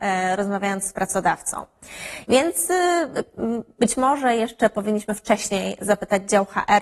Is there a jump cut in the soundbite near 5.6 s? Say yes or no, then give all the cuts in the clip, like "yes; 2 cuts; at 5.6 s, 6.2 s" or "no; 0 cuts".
no; 1 cut; at 2.2 s